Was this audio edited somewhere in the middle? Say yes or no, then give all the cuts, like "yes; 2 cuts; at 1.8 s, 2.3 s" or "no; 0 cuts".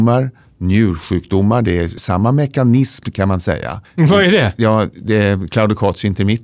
yes; 2 cuts; at 2.0 s, 3.8 s